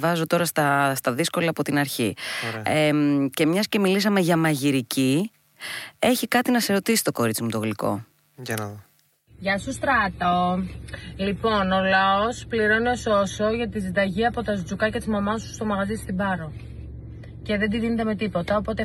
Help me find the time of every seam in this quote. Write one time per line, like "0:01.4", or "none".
none